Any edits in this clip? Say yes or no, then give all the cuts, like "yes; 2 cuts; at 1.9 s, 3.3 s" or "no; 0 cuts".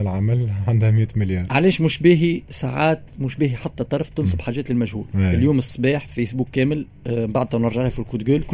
no; 0 cuts